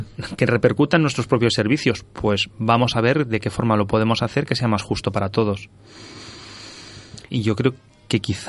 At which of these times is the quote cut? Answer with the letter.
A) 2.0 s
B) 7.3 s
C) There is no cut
B